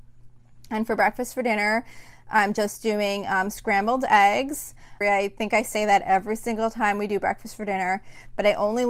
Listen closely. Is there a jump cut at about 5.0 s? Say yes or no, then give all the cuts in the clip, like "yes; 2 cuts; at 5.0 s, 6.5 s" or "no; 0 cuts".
yes; 1 cut; at 5.0 s